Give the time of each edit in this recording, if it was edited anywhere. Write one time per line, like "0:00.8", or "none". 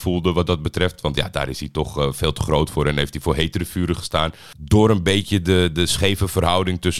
none